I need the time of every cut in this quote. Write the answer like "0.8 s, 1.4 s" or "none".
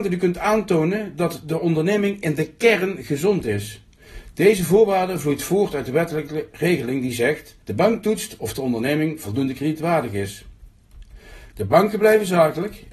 7.6 s, 11.5 s